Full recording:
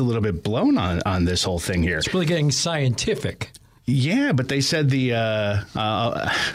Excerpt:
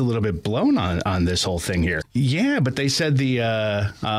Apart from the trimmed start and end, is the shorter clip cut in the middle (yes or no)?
yes